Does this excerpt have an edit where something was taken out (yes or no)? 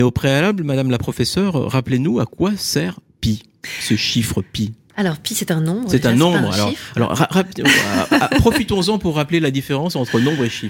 no